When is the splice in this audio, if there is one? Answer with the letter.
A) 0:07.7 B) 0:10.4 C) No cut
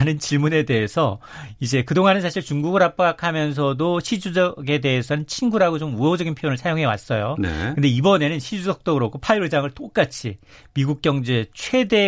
C